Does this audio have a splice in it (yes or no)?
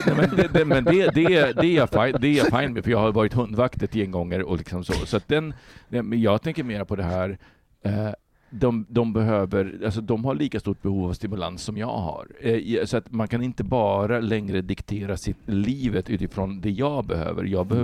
no